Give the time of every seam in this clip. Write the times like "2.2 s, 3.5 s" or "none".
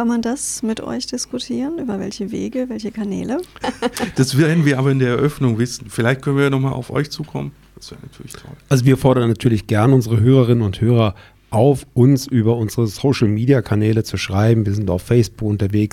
3.6 s